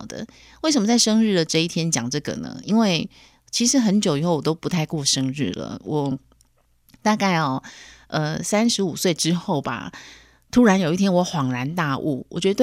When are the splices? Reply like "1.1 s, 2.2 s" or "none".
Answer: none